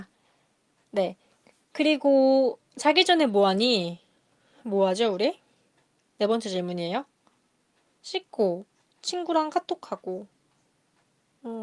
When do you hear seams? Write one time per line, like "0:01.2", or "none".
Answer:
0:08.8